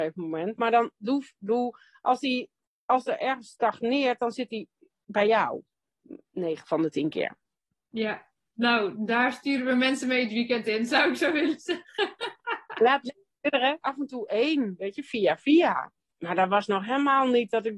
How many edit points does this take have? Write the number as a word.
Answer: one